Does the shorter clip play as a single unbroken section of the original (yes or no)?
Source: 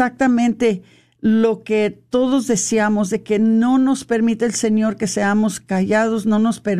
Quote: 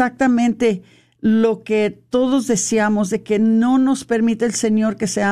yes